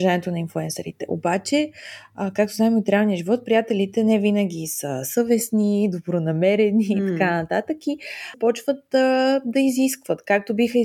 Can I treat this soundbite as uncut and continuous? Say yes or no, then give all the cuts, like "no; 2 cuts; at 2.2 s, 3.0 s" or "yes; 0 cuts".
yes; 0 cuts